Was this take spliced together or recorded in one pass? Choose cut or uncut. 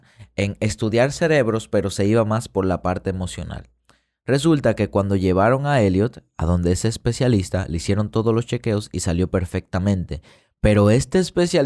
uncut